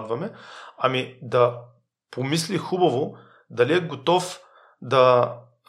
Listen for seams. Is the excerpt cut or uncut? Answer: uncut